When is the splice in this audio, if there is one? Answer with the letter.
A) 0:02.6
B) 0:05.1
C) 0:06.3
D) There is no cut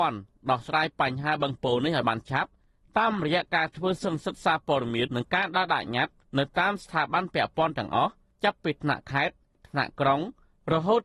B